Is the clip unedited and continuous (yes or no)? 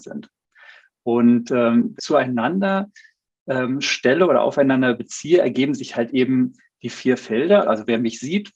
no